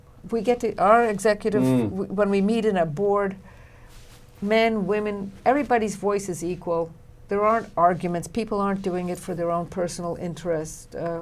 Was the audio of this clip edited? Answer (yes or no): no